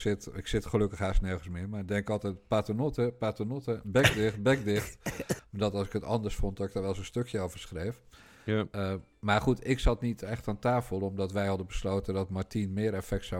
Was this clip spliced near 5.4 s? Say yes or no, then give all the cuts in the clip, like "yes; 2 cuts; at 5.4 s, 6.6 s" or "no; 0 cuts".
yes; 1 cut; at 5.4 s